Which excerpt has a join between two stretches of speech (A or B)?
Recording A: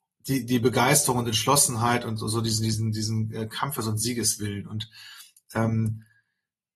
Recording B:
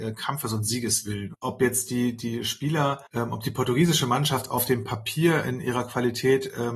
B